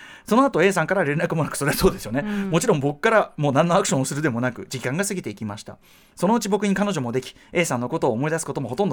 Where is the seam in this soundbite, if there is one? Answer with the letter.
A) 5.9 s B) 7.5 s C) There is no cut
C